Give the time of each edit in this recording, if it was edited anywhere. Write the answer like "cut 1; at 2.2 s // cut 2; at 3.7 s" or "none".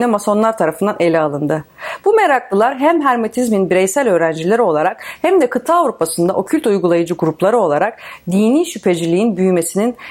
none